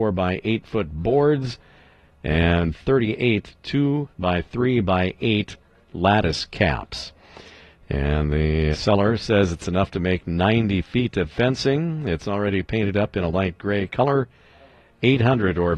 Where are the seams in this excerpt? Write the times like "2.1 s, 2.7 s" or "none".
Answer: 8.7 s